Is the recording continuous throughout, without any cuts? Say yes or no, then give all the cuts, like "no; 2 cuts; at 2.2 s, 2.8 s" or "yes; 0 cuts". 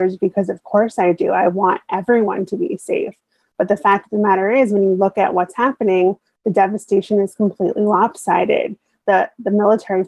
yes; 0 cuts